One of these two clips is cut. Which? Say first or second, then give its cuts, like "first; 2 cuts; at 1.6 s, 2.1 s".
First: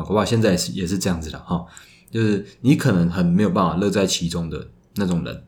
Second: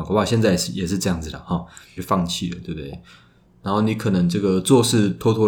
second; 1 cut; at 2.0 s